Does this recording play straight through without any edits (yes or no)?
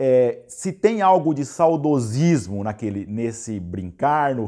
yes